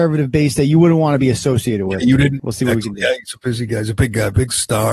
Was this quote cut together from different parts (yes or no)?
yes